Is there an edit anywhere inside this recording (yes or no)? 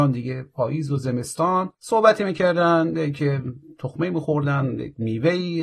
yes